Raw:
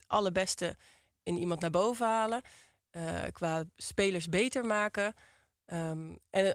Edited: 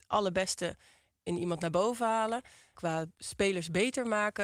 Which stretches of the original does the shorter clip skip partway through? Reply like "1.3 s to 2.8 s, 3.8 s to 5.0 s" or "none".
2.7 s to 3.3 s